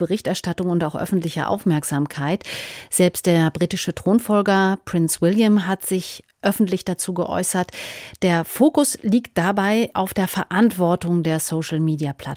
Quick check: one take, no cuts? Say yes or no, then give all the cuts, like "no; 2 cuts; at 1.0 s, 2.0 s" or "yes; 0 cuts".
no; 1 cut; at 9.9 s